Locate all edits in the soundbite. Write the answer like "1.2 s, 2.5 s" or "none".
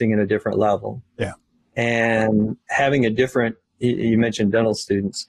none